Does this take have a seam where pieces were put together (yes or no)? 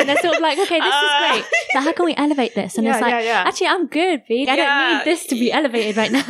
yes